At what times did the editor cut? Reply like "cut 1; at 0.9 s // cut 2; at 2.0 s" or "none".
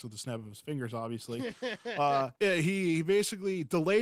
cut 1; at 2.4 s